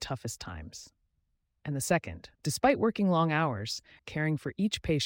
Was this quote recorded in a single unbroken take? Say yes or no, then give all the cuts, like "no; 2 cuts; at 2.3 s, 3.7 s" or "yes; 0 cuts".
no; 2 cuts; at 2.3 s, 4.0 s